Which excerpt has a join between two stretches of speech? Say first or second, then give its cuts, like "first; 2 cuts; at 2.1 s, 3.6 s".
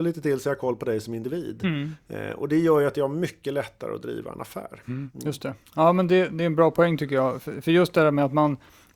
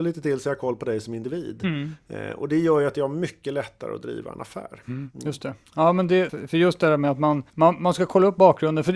second; 2 cuts; at 6.3 s, 7.5 s